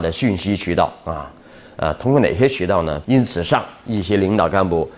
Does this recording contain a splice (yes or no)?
yes